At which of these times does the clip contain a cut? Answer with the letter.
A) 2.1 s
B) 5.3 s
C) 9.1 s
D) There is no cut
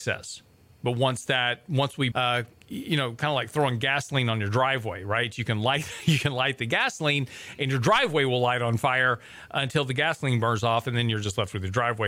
A